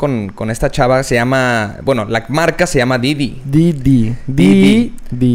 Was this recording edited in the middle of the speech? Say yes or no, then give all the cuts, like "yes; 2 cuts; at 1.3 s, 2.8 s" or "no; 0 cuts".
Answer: no; 0 cuts